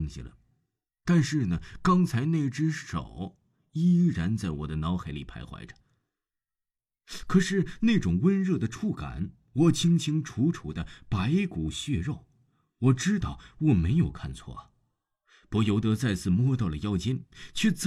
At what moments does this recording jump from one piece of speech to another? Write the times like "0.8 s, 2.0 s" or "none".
none